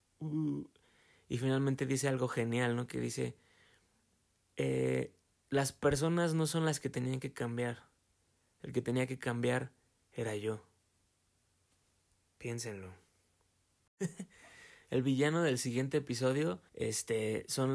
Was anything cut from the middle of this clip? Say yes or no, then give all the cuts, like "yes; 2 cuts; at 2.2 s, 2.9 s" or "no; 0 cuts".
yes; 1 cut; at 16.7 s